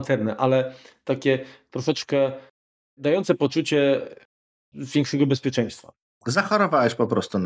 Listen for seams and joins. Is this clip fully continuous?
no; 1 cut; at 6.2 s

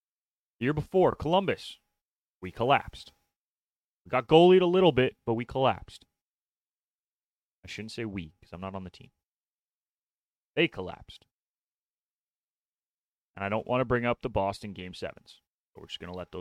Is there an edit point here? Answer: no; 0 cuts

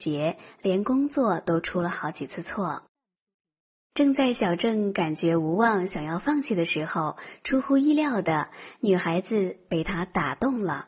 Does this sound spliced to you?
no; 0 cuts

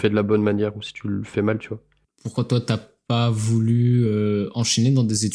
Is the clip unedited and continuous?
yes; 0 cuts

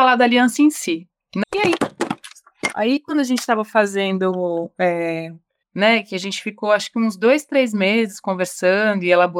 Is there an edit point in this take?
yes; 2 cuts; at 1.4 s, 5.6 s

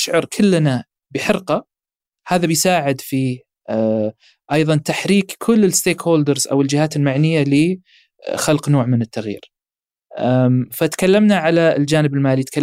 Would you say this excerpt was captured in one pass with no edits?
yes; 0 cuts

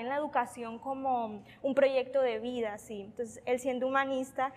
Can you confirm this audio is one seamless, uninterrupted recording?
yes; 0 cuts

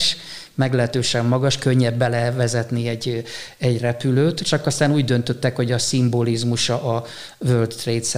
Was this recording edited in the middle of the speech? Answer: no; 0 cuts

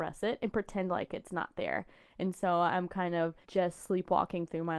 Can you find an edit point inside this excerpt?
yes; 1 cut; at 3.4 s

